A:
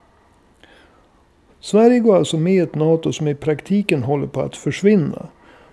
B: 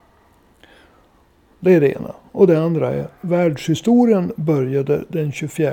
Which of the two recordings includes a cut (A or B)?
A